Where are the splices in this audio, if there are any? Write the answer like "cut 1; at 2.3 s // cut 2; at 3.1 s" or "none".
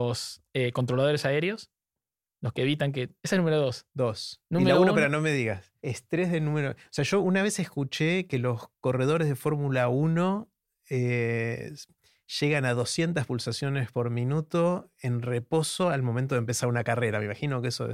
cut 1; at 3.2 s // cut 2; at 5.8 s